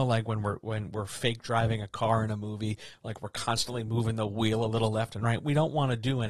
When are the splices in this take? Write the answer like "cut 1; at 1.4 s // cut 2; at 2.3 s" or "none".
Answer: none